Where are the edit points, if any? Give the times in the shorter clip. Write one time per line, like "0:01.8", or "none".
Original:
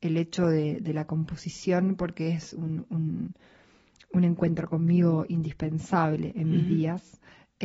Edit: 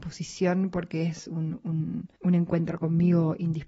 0:02.1